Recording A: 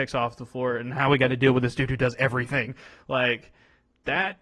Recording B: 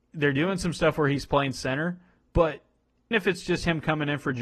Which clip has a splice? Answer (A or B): B